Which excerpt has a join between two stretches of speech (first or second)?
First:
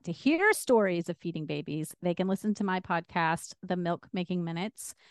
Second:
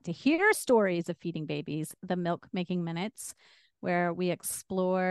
second